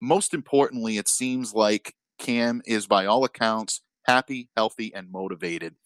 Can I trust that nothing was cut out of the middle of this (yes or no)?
yes